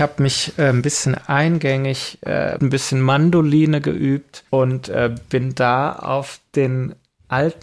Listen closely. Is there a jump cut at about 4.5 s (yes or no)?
yes